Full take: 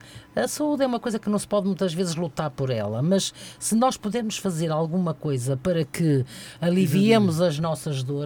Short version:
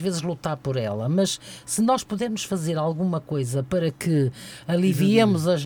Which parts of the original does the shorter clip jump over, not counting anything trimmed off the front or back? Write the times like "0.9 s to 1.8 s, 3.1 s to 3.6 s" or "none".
none

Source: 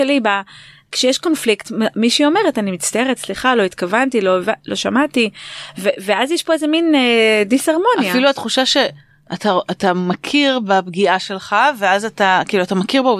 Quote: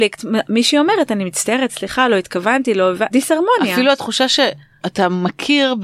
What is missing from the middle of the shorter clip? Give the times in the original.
4.6 s to 7.5 s, 9.2 s to 9.6 s

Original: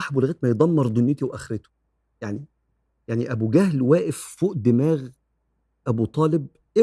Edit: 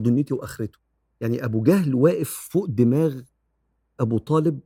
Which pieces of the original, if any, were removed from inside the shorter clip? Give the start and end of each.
2.0 s to 2.9 s

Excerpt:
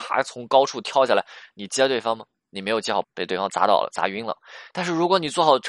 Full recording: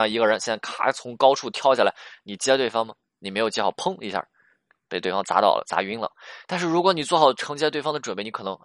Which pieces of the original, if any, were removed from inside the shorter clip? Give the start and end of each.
3.7 s to 4.8 s

